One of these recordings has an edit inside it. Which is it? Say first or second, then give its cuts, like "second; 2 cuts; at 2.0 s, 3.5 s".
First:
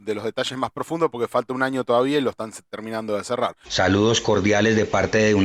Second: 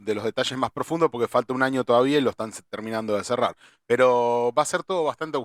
first; 1 cut; at 3.6 s